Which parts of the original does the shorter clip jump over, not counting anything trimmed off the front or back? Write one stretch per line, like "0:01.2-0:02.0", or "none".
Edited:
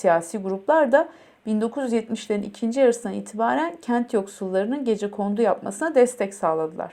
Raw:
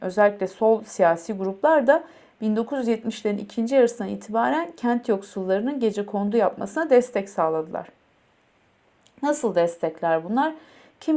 none